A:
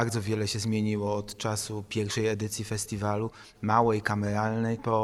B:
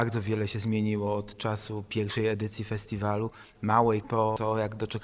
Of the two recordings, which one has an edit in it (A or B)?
B